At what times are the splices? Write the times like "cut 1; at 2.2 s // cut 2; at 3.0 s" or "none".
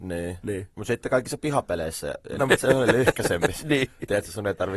cut 1; at 2.4 s